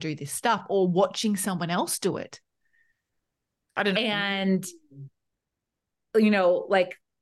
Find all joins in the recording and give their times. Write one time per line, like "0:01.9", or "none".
0:03.9